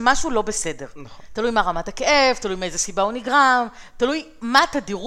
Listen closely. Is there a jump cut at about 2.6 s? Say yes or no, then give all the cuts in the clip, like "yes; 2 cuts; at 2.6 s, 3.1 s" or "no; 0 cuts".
no; 1 cut; at 1.3 s